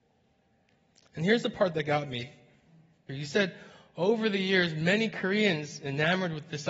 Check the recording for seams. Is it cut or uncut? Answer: cut